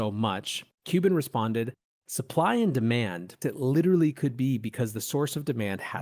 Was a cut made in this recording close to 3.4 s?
yes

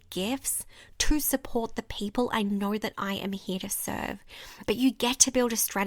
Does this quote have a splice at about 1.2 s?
no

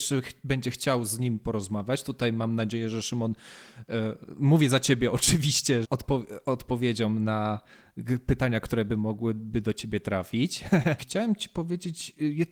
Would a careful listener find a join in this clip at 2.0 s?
no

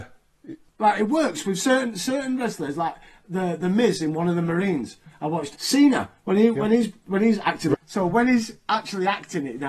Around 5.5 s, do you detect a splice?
yes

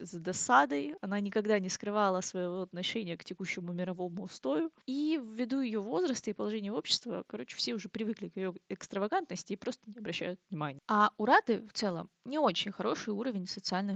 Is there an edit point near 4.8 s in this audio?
yes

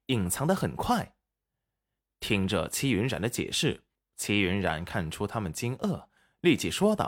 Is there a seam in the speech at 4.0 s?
yes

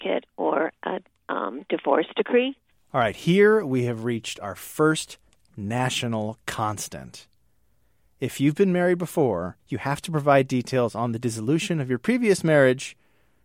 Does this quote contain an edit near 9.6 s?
yes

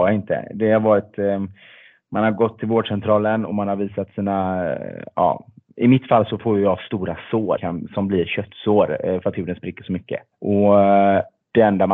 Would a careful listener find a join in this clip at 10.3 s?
no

